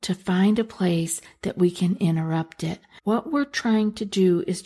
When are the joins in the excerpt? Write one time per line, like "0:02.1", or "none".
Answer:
0:03.0